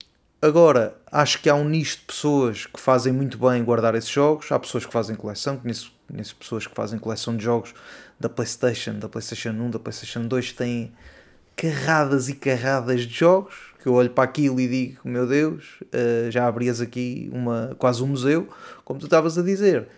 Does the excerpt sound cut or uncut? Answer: uncut